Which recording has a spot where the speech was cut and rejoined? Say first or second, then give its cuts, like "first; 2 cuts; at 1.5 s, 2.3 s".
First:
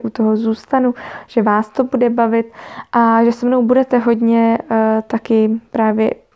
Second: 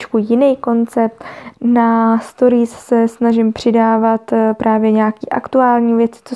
second; 1 cut; at 1.5 s